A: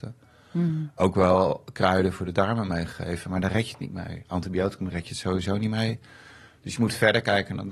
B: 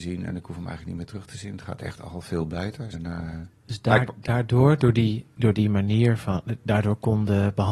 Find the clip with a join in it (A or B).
B